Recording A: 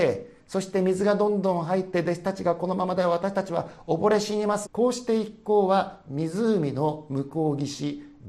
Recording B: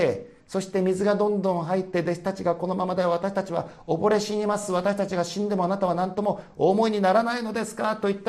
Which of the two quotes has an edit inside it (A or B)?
A